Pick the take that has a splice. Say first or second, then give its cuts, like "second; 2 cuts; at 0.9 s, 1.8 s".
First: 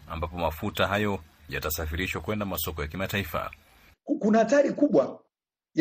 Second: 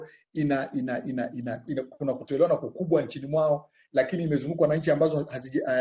first; 1 cut; at 3.9 s